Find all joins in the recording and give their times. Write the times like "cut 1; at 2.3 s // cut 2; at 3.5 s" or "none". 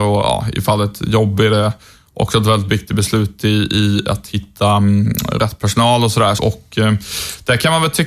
cut 1; at 6.4 s